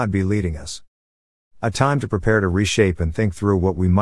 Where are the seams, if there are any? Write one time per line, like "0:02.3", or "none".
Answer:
none